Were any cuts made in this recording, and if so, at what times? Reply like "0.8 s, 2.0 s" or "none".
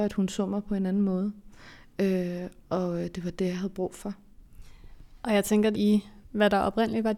5.7 s